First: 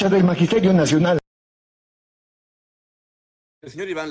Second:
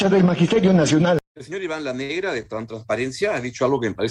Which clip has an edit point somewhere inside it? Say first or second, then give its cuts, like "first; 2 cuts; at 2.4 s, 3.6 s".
second; 1 cut; at 1.3 s